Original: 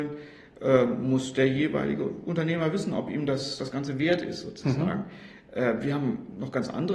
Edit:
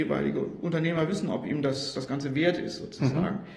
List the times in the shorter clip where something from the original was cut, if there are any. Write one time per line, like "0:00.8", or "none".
none